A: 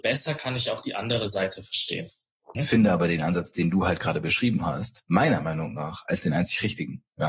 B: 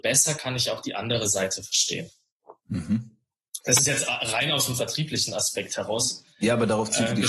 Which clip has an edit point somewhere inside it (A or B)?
A